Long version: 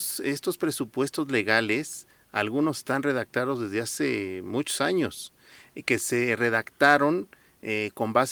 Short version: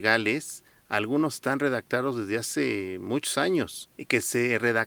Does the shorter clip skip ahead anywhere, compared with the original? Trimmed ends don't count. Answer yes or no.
yes